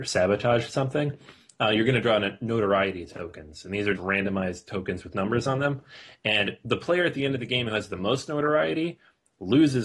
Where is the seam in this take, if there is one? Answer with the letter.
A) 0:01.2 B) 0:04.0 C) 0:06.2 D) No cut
B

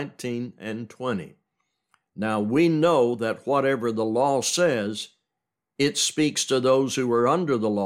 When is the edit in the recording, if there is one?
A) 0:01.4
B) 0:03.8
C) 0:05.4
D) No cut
D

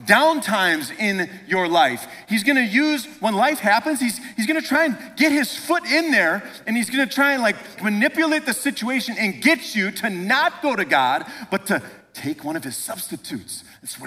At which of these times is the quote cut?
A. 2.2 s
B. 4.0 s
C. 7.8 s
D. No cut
C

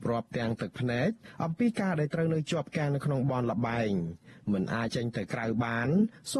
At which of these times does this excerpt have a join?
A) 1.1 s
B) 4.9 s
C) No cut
B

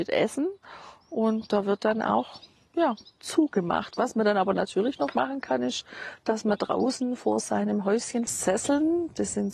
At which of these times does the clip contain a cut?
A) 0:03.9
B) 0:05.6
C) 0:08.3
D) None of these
C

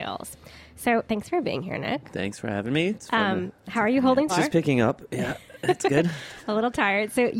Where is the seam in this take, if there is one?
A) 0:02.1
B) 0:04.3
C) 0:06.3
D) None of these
B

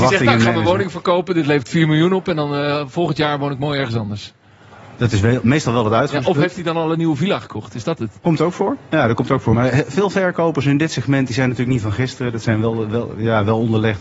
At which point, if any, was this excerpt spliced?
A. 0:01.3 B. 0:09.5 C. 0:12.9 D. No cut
D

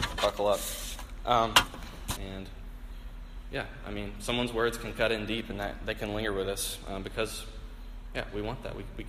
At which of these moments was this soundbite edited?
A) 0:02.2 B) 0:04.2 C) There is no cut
A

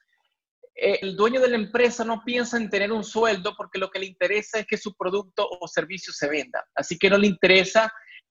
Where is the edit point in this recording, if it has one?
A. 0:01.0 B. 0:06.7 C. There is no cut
A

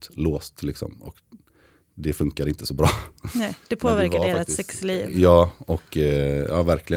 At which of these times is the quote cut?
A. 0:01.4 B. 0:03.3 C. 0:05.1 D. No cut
D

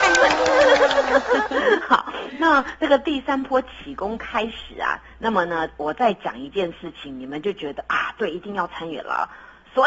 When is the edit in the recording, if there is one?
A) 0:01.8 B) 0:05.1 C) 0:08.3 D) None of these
D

